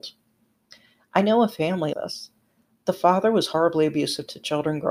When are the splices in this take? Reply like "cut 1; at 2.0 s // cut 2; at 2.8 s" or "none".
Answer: cut 1; at 1.9 s

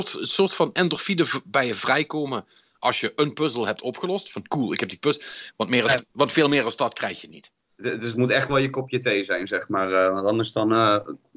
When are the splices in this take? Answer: cut 1; at 5.5 s

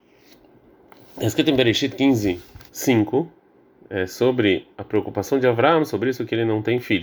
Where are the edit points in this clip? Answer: cut 1; at 2.7 s

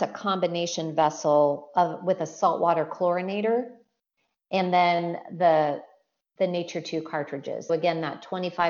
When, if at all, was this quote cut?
cut 1; at 7.7 s

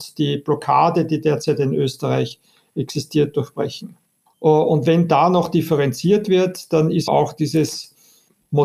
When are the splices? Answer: cut 1; at 4.3 s // cut 2; at 7.1 s

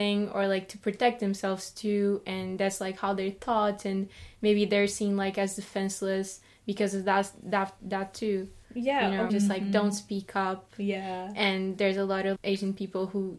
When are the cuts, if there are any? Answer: cut 1; at 9.3 s // cut 2; at 12.4 s

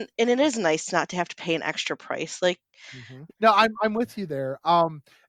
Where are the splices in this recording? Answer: cut 1; at 3.3 s

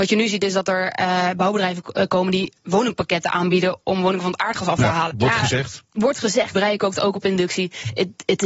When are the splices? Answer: cut 1; at 5.1 s // cut 2; at 6.5 s

